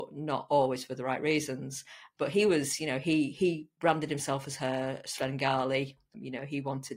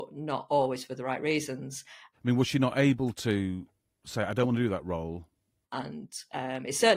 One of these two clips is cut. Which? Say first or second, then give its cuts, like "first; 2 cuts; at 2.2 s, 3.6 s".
second; 2 cuts; at 2.1 s, 5.6 s